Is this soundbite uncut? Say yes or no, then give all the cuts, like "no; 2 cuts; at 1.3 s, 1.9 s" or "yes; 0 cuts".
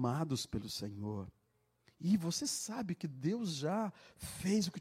yes; 0 cuts